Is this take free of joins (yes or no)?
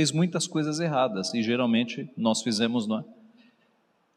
yes